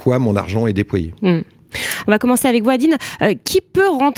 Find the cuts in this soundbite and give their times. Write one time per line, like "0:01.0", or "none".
0:02.0